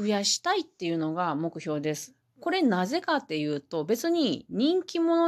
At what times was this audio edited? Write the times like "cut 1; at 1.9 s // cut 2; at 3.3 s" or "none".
none